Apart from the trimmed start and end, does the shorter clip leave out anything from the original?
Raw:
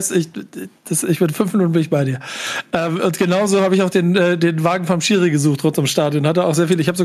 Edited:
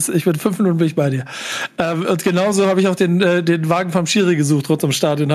no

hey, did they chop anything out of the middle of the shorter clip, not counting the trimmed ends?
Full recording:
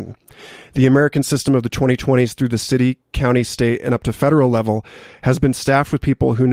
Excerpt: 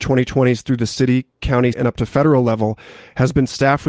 yes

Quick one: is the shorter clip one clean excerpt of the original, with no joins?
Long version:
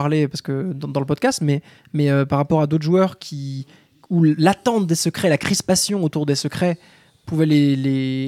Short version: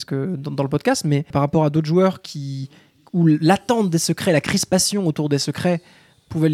no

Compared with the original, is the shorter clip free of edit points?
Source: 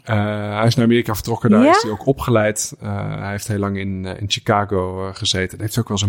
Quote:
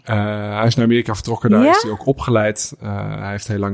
yes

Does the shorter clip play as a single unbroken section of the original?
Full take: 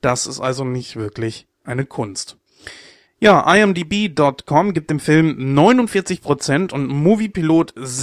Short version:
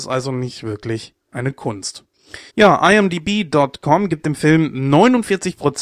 no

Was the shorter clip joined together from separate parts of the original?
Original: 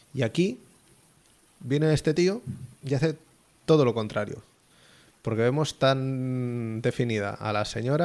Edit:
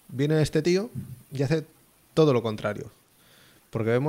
no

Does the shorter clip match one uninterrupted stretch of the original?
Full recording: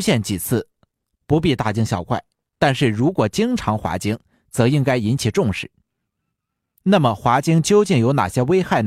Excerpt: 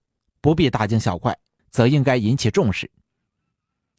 no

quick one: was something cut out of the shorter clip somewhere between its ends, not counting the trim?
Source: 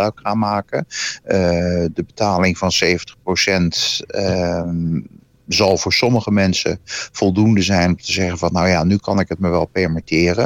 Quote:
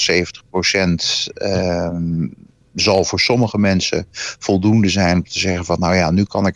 no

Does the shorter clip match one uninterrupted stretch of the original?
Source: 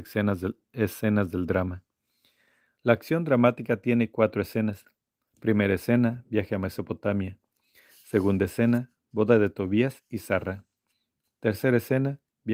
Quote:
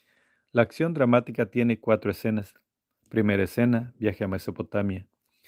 yes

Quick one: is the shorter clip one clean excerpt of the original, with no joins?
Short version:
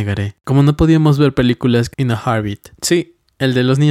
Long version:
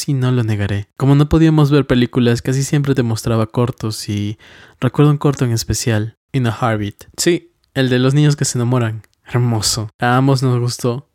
no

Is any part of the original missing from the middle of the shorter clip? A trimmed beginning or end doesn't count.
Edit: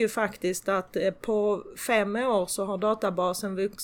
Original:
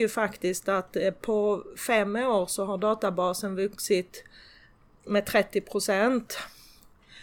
no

